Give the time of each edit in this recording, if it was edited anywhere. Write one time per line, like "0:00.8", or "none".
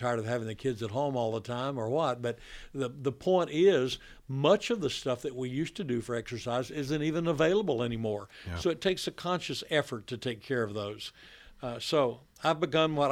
none